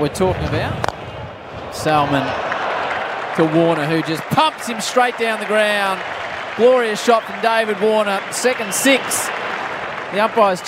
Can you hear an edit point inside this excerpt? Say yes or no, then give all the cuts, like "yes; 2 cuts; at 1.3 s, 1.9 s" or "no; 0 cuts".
no; 0 cuts